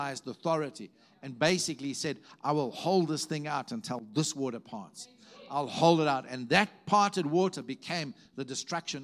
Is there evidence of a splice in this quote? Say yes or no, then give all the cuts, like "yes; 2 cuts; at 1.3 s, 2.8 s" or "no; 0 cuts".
no; 0 cuts